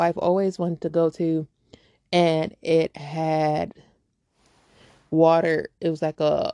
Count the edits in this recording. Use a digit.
0